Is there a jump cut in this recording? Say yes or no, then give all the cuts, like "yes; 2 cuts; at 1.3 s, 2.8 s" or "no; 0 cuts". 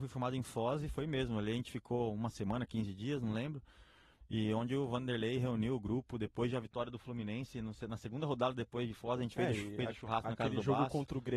no; 0 cuts